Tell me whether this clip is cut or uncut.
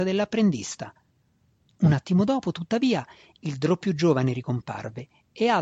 cut